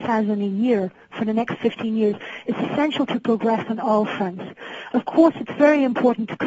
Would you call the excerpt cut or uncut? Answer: uncut